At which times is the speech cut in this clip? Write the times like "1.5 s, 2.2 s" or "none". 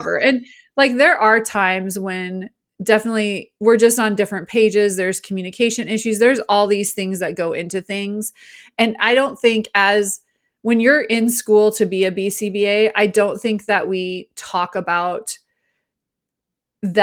none